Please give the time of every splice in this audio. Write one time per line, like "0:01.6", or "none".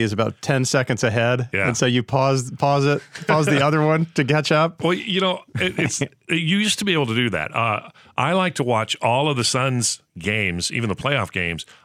none